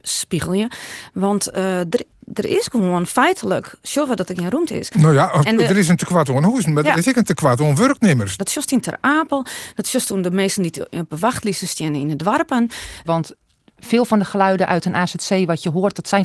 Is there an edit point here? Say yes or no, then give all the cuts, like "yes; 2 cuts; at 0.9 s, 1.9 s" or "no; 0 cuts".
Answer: yes; 2 cuts; at 8.4 s, 13.0 s